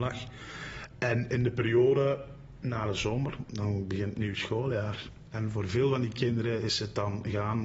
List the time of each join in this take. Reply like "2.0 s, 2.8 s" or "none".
none